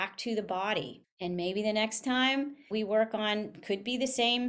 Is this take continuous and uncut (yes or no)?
yes